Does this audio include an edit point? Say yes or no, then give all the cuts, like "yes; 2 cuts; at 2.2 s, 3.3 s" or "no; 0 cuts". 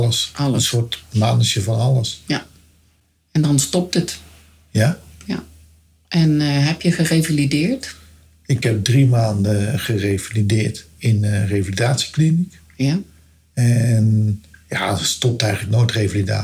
no; 0 cuts